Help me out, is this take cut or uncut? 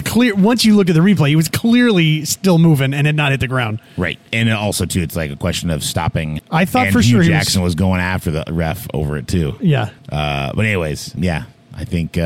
cut